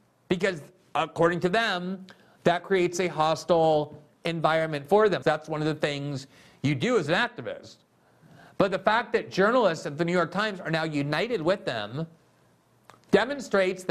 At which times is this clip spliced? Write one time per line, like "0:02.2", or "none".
0:05.2